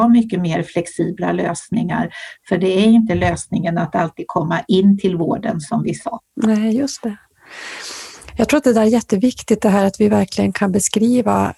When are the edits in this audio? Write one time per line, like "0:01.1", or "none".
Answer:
0:06.3